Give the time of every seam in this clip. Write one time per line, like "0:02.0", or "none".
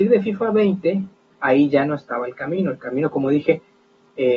none